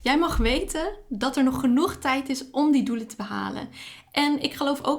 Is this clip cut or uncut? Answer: uncut